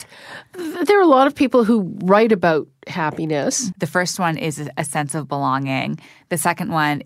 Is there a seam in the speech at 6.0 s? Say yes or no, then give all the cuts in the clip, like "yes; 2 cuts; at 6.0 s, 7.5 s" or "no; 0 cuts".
no; 1 cut; at 3.7 s